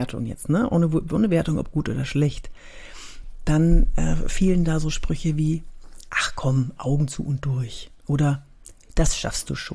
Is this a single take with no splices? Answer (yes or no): yes